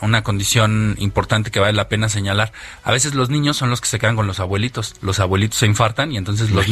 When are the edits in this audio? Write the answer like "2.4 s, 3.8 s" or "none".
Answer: none

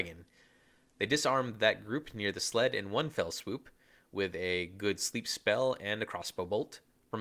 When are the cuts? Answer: none

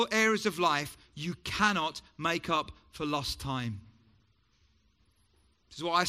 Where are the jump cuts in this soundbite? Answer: none

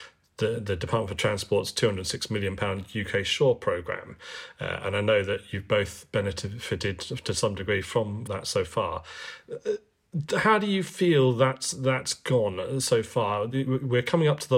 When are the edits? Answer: 8.3 s

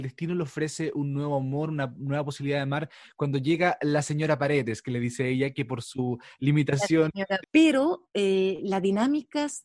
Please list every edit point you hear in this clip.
7.4 s

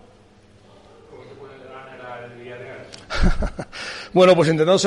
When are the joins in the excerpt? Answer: none

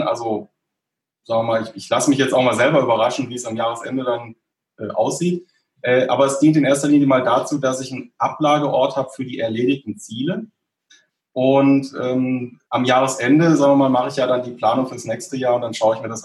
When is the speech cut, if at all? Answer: 12.7 s

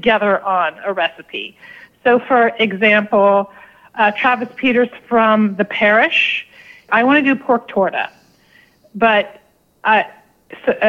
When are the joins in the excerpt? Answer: 6.9 s

